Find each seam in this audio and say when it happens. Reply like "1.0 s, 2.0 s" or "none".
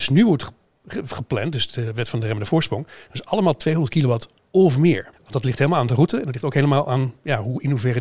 5.1 s